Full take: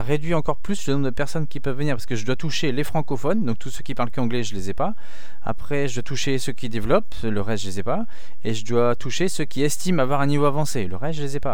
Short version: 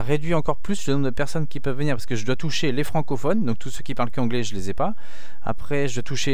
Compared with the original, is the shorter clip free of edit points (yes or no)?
yes